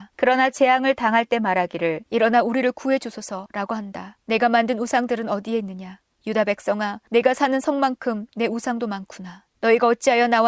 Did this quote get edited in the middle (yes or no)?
yes